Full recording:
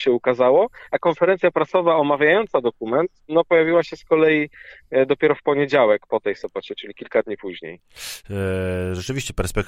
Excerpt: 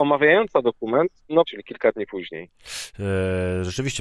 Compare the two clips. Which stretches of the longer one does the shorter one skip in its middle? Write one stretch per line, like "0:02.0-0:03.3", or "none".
0:03.4-0:06.8